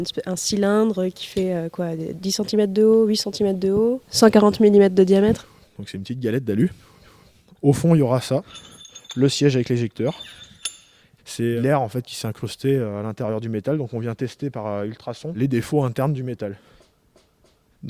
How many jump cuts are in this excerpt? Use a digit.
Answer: 2